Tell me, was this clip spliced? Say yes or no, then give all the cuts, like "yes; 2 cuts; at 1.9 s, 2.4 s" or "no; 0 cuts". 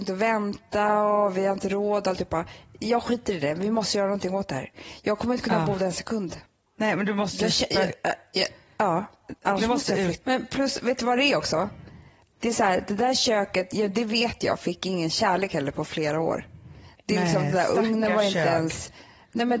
yes; 1 cut; at 10.2 s